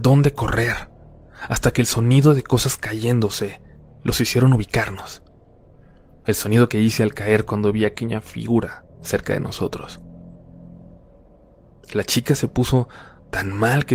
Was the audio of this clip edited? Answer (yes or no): no